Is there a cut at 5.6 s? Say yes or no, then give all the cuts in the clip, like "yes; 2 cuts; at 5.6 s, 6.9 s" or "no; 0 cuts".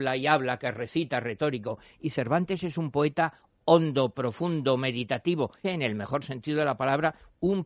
yes; 1 cut; at 5.6 s